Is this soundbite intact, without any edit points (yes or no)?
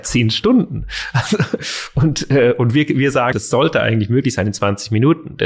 no